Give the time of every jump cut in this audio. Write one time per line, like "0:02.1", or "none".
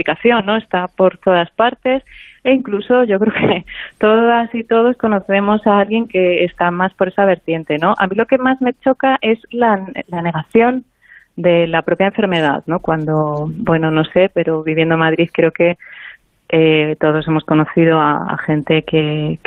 none